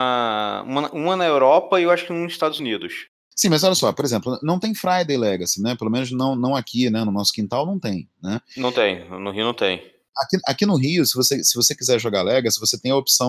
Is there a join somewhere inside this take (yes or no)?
no